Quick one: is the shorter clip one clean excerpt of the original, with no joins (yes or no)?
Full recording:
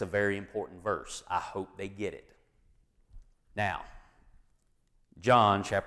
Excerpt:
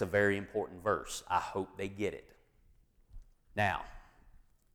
yes